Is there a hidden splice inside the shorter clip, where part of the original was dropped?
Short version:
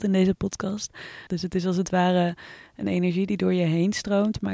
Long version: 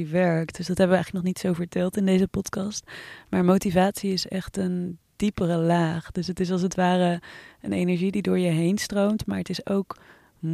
yes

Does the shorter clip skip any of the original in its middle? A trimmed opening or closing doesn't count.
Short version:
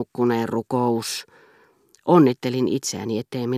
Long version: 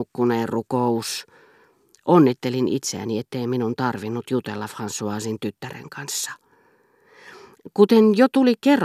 no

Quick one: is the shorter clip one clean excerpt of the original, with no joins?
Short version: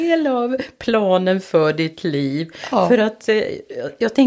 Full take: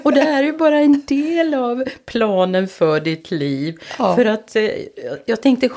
yes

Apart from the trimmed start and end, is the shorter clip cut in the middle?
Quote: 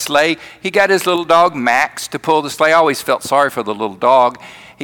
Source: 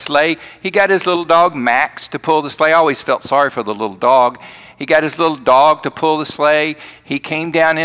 no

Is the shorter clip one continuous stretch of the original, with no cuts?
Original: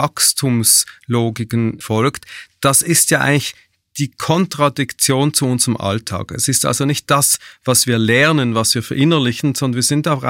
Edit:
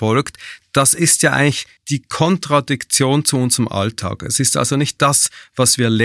no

